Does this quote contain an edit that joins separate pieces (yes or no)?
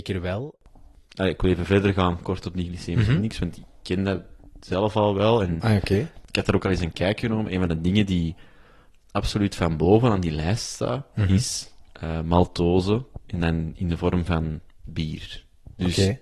no